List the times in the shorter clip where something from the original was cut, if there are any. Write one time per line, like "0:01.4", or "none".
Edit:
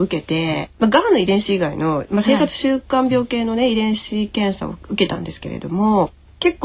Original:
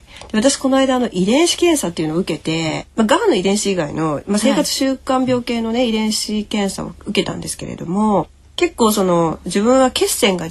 none